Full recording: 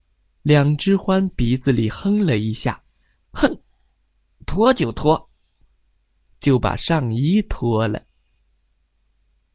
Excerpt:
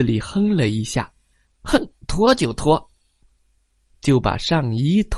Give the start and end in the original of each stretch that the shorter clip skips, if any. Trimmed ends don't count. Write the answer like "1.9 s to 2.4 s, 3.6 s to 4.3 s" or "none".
3.7 s to 4.3 s